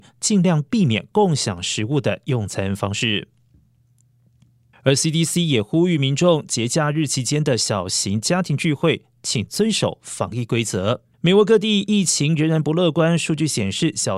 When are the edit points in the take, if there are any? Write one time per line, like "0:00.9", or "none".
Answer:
0:04.7
0:11.1

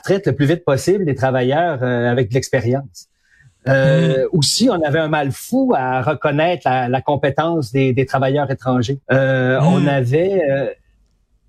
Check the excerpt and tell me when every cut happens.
0:09.0

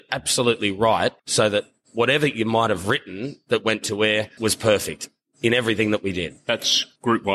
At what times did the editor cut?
0:01.2
0:04.4

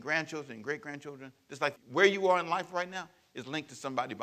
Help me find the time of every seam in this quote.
0:01.8

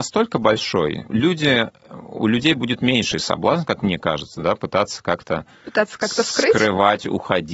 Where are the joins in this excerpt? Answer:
0:01.1

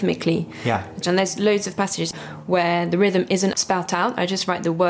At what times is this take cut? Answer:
0:01.0
0:03.5

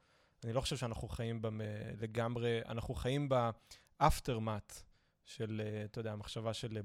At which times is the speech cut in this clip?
none

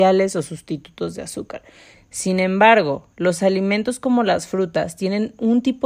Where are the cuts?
0:01.9

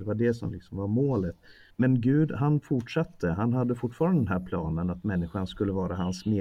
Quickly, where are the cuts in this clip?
0:01.7

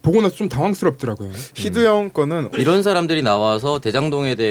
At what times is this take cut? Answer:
0:02.5

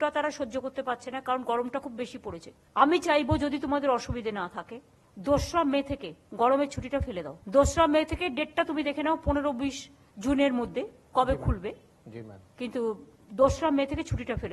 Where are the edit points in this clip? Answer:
0:07.4

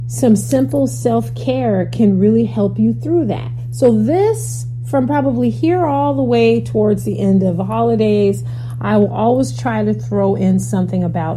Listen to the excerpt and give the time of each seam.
none

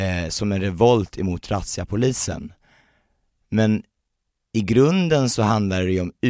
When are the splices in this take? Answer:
none

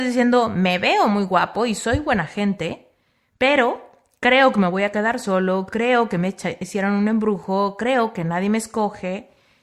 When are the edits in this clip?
none

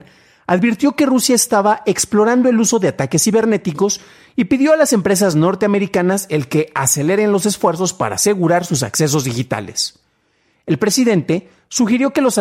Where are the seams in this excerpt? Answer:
none

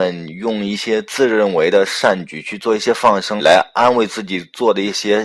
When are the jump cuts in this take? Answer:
0:03.4

